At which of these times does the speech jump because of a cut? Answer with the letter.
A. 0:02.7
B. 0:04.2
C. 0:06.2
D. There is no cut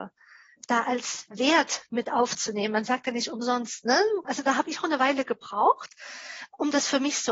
B